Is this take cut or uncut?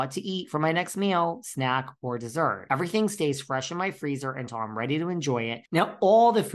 uncut